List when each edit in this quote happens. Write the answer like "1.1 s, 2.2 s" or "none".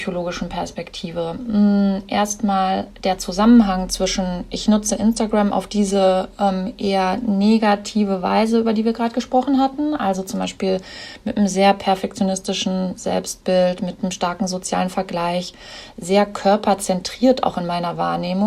none